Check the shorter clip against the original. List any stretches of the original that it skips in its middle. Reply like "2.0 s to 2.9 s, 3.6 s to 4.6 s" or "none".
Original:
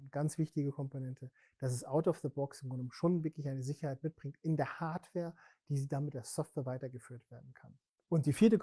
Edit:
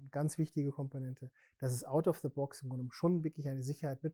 none

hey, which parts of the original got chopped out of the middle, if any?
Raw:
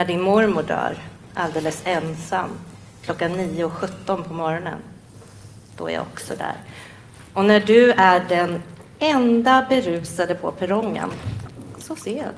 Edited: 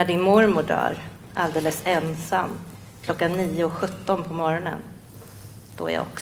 none

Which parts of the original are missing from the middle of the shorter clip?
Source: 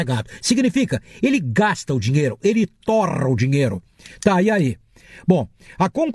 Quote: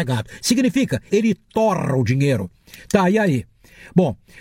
1.1 s to 2.4 s

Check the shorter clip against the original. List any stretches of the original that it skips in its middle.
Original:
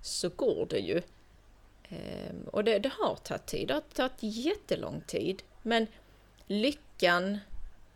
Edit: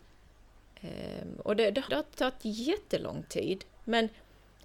3.0 s to 3.7 s

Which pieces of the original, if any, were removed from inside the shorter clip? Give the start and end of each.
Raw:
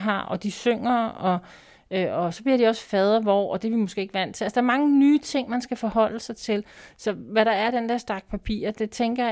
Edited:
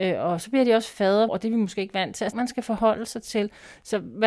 3.2 s to 3.5 s, 4.5 s to 5.5 s

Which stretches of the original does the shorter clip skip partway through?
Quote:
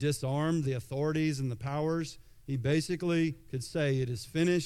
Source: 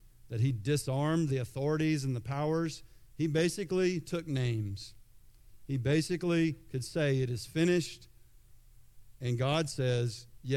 3.1 s to 5.7 s

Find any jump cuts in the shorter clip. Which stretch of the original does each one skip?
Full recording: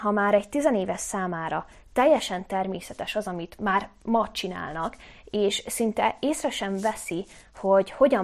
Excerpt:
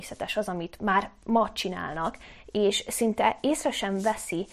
none

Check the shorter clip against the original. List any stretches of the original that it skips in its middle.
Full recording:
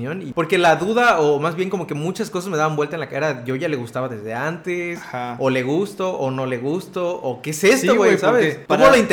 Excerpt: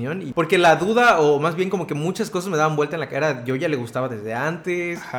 none

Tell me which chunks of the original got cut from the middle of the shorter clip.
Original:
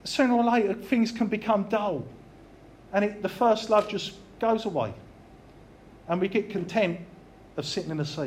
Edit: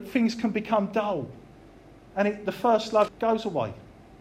3.8 s to 4.3 s

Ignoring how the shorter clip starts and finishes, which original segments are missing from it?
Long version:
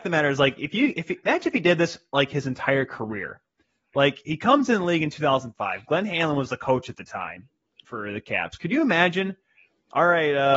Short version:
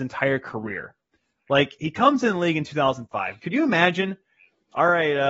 5.9 s to 8.6 s

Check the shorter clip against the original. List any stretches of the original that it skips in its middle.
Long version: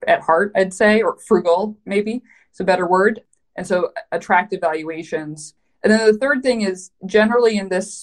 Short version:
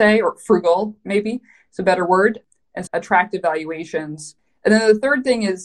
3.7 s to 4.1 s

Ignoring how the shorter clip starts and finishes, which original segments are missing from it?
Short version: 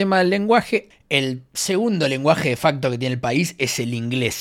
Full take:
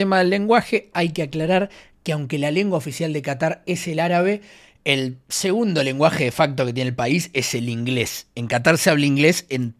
0.9 s to 4.7 s

